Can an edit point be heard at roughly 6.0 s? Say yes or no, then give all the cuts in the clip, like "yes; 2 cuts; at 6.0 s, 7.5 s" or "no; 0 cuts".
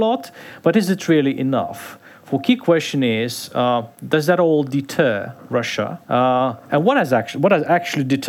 yes; 1 cut; at 6.0 s